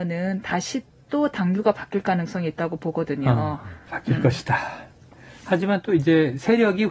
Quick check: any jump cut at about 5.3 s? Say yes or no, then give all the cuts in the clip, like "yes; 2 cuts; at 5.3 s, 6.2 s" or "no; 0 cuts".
no; 1 cut; at 3.9 s